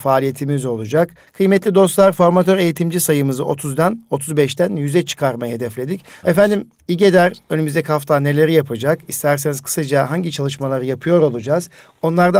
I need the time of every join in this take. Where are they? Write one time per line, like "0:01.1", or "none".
0:01.3
0:06.2

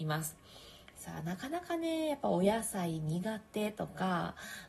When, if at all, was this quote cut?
0:00.9

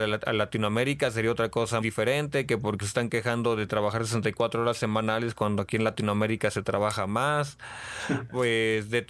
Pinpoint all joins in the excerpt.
0:01.8
0:02.8

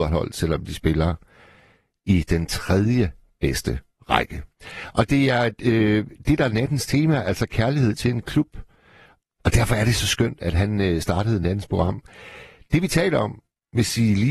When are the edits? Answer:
0:09.2

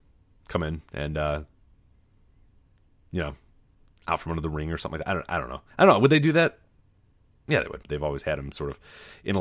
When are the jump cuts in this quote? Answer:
0:05.7
0:07.8

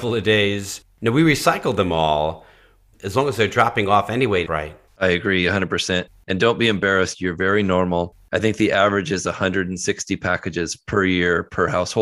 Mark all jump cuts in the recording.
0:02.9
0:04.4

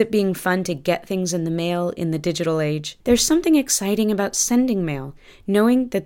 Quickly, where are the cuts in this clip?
0:03.0

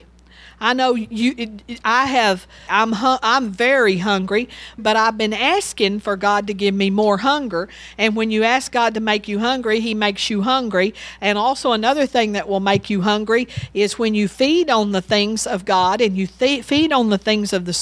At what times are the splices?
0:02.7
0:04.8

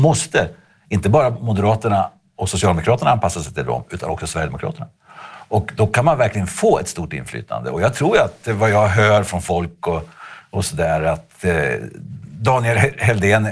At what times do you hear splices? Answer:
none

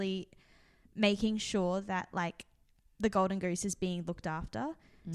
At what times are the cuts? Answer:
none

